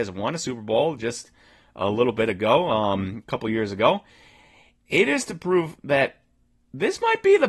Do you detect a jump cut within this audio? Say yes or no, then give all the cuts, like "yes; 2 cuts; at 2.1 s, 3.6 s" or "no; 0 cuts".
no; 0 cuts